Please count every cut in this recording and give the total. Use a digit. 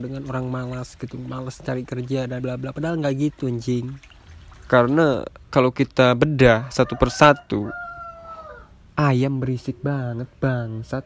1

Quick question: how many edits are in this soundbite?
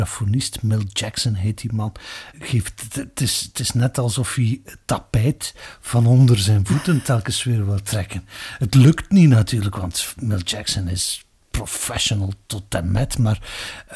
1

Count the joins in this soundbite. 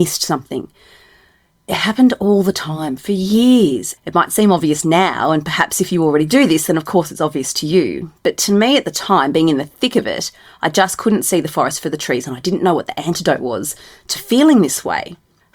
1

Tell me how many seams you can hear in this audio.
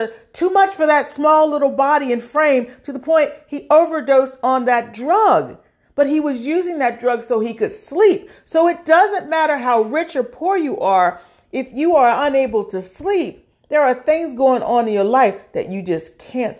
0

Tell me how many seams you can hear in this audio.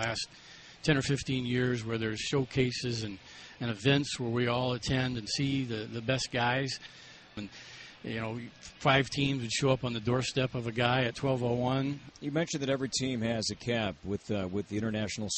2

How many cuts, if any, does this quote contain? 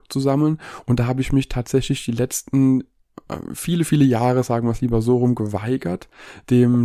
0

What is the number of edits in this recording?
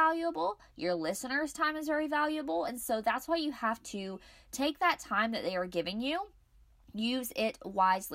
0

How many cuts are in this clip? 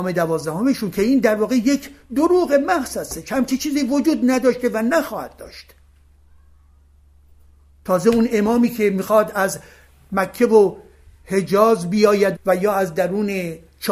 1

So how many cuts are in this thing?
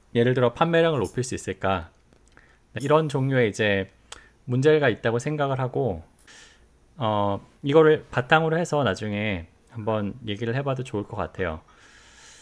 1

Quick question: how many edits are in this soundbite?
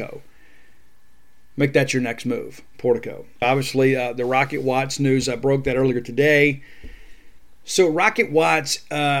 1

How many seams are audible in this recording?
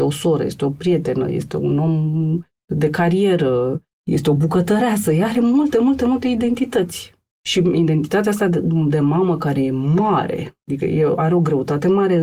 0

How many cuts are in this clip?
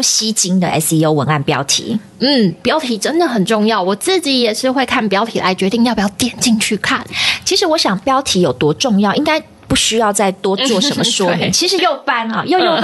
1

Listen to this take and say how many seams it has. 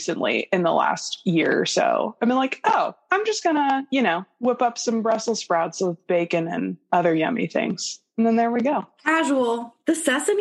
0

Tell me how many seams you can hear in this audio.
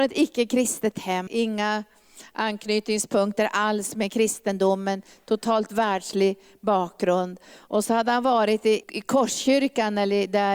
2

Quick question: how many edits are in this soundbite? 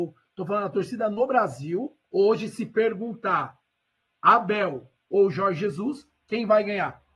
1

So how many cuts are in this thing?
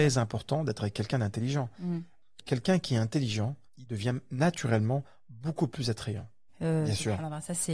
2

